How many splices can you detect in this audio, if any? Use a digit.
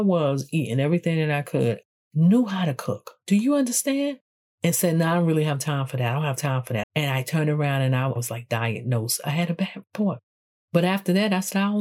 1